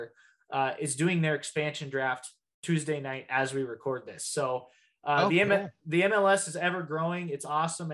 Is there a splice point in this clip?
no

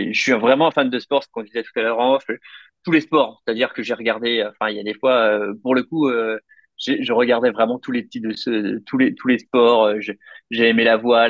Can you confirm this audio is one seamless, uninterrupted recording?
yes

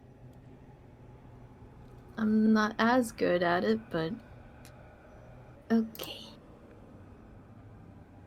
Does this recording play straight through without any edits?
no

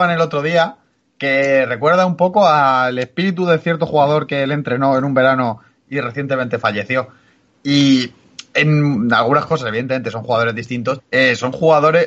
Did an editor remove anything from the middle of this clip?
yes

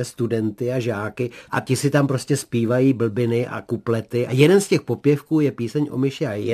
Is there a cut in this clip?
yes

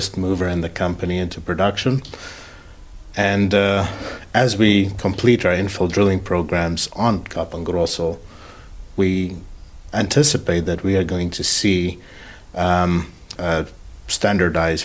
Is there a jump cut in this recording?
yes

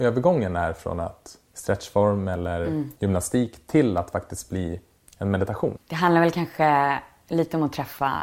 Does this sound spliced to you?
yes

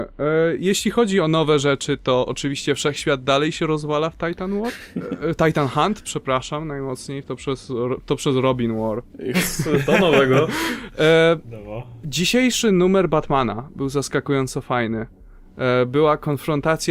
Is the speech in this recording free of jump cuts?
no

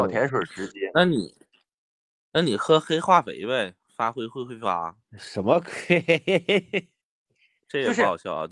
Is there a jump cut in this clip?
no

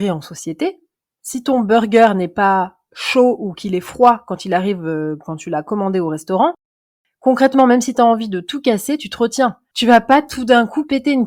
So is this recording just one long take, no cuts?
no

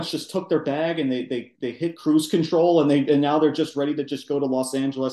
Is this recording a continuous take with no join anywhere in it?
yes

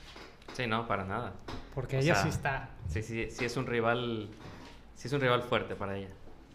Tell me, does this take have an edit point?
no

